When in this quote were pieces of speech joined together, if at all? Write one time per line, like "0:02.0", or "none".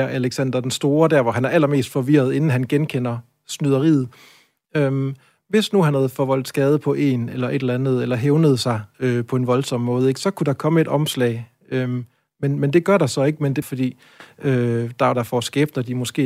0:13.6
0:15.1